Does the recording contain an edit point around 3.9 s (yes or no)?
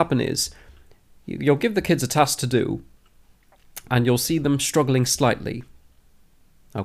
yes